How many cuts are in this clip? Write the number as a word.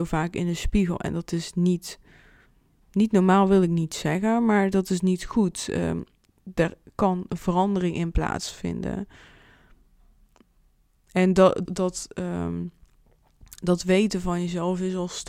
one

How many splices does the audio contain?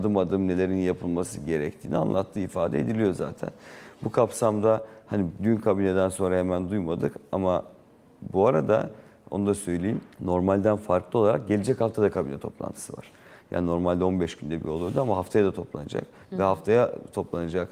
one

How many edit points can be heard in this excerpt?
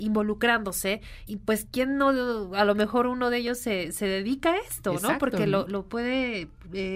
one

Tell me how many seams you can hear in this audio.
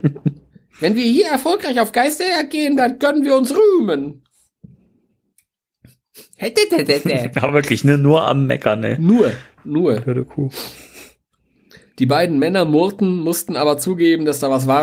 zero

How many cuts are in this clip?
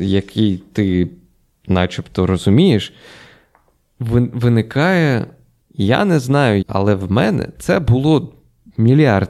two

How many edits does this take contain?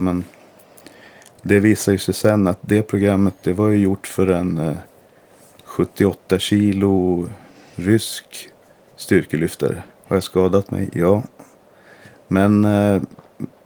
one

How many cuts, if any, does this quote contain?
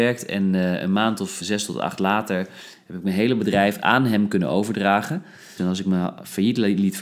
two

